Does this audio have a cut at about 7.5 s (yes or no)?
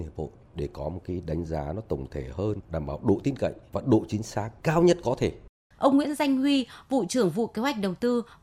no